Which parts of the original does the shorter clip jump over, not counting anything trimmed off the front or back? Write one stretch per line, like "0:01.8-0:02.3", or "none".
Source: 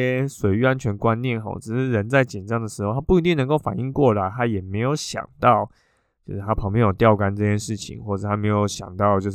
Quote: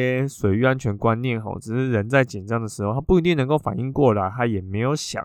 none